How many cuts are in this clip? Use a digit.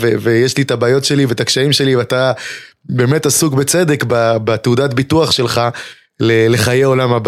0